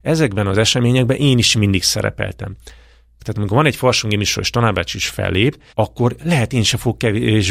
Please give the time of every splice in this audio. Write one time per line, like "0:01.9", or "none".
0:03.2
0:05.7